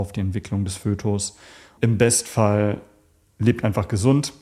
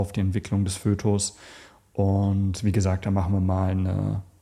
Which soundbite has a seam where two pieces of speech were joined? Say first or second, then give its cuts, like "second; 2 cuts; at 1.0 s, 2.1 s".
first; 1 cut; at 1.8 s